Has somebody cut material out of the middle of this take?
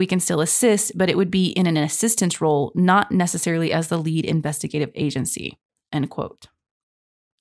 no; 0 cuts

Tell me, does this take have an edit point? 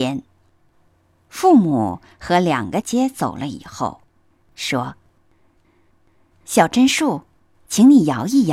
yes; 2 cuts; at 2.8 s, 4.5 s

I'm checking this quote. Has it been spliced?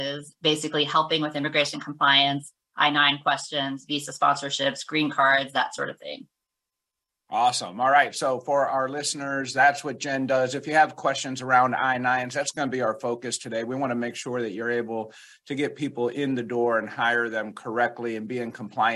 no; 0 cuts

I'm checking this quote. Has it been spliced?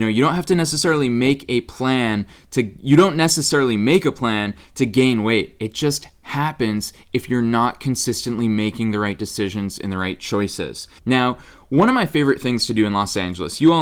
yes; 1 cut; at 11.0 s

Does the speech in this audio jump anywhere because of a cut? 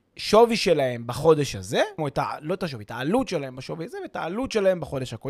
yes; 1 cut; at 2.0 s

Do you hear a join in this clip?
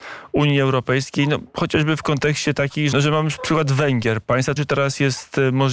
yes; 2 cuts; at 2.9 s, 4.6 s

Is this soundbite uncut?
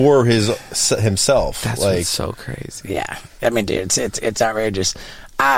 yes; 0 cuts

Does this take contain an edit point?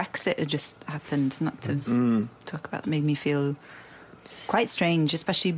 yes; 1 cut; at 2.8 s

